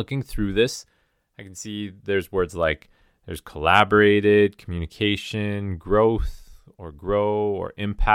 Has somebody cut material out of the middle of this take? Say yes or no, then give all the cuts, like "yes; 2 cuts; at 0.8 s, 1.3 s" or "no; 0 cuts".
no; 0 cuts